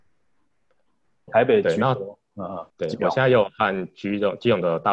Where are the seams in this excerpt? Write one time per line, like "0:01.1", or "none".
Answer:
0:01.3
0:02.7